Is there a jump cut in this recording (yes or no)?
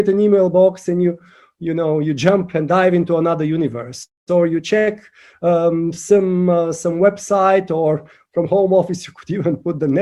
no